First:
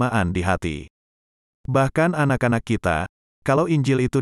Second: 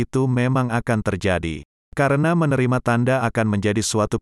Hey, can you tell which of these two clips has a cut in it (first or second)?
second